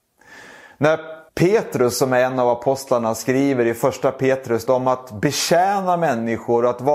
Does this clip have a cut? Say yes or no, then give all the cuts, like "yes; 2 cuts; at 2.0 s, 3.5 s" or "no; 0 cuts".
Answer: yes; 2 cuts; at 1.3 s, 4.7 s